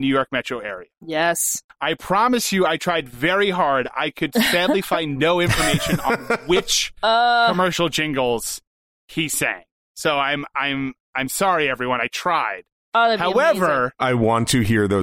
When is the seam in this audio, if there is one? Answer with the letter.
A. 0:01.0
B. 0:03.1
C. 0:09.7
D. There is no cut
D